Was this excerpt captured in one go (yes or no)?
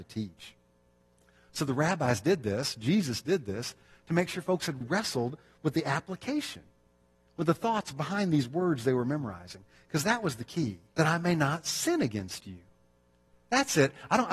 no